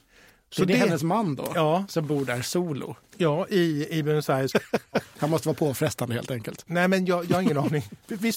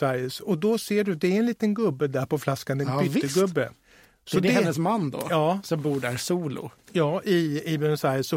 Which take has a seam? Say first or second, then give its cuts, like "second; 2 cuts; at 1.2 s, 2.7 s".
first; 2 cuts; at 4.5 s, 6.7 s